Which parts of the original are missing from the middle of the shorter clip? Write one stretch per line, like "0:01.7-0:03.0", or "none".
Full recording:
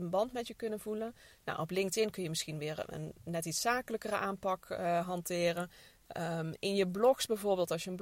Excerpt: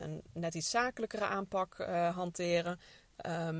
none